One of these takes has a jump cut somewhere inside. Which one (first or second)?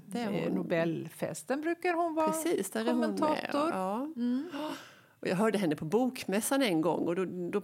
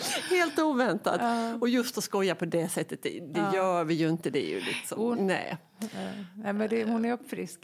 second